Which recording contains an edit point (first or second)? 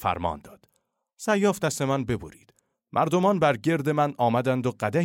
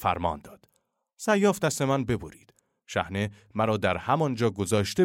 first